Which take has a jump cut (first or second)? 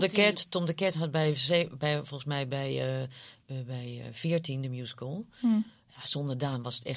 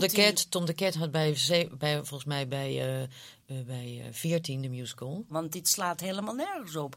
second